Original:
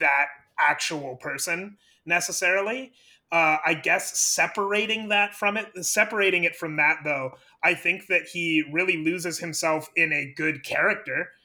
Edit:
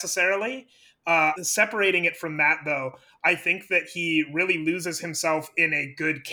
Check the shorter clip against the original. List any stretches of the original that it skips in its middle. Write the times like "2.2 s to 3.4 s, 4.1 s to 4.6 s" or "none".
3.6 s to 5.7 s